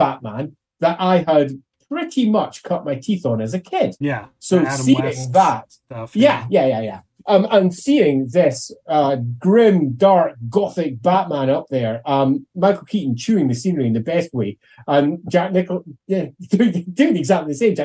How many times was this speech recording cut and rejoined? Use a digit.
0